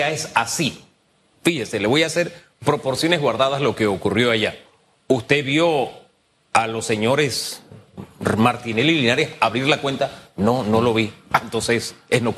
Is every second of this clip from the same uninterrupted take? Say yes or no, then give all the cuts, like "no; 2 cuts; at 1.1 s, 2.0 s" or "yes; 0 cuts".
yes; 0 cuts